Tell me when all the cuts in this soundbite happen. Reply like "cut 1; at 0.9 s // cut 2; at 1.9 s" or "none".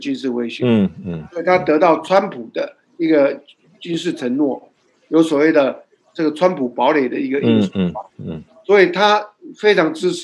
none